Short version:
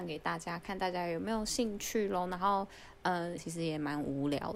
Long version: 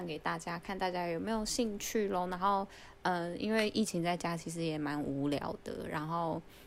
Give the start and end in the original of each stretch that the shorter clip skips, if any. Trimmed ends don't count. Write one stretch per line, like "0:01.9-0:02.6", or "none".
0:03.4-0:04.4